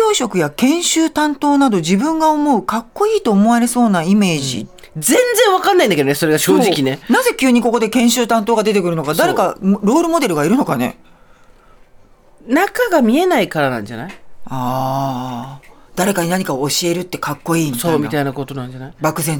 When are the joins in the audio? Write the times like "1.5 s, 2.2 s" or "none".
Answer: none